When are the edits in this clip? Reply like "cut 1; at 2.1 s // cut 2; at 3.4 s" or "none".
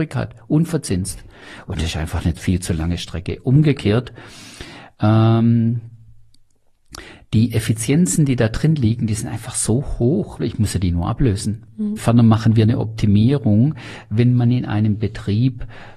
cut 1; at 10.4 s // cut 2; at 12.0 s